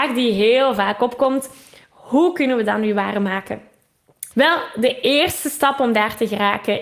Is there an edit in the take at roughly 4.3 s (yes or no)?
yes